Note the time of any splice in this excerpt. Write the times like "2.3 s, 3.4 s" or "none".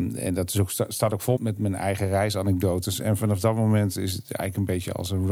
1.4 s